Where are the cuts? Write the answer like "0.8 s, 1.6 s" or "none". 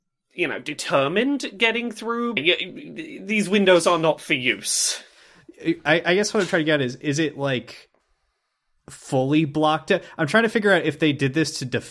2.4 s